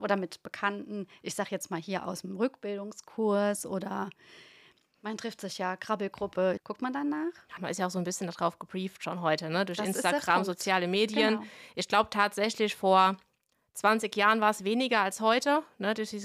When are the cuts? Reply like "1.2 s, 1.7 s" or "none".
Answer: 6.6 s, 7.6 s